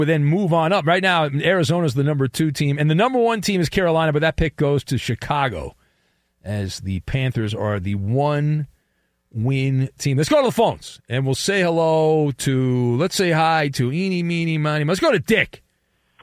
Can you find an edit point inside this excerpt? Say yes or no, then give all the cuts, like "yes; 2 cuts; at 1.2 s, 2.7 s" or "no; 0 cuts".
no; 0 cuts